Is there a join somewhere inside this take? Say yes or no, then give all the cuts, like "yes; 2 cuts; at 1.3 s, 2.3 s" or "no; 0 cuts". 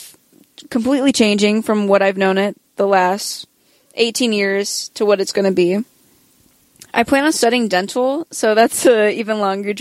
no; 0 cuts